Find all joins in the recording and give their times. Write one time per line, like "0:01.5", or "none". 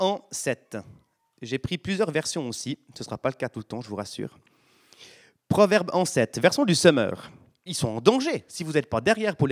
0:07.7